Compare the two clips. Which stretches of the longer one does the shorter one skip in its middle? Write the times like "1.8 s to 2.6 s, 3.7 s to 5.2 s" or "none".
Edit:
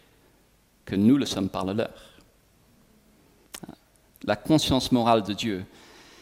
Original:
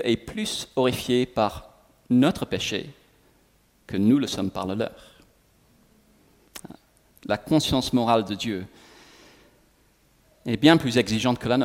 none